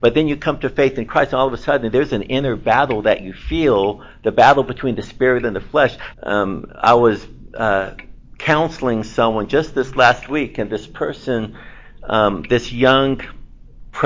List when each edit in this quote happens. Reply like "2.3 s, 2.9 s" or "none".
6.1 s